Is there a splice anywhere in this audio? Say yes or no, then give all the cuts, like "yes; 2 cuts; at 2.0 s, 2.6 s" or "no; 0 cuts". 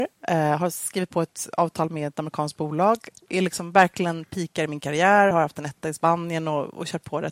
no; 0 cuts